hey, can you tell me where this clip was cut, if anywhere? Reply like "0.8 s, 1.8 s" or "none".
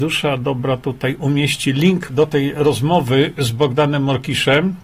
2.1 s